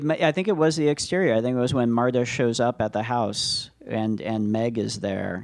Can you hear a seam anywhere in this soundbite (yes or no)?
no